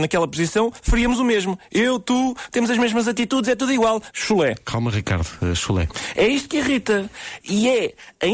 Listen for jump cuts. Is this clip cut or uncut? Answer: cut